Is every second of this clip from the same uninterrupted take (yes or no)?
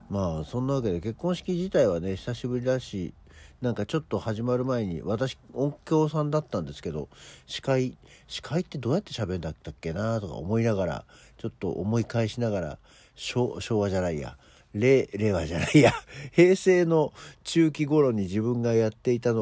yes